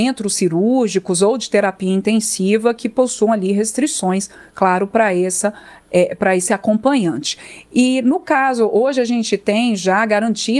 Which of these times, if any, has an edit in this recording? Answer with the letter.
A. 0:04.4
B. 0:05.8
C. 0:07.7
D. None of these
D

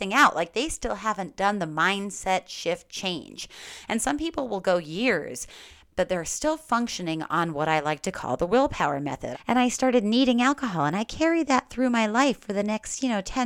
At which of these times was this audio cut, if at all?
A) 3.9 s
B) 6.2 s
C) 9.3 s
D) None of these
C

